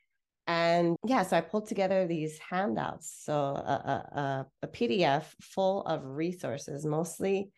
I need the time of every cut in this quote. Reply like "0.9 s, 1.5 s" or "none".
1.0 s